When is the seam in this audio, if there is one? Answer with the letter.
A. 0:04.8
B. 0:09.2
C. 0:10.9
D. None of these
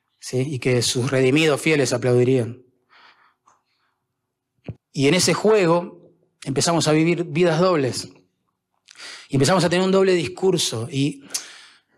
A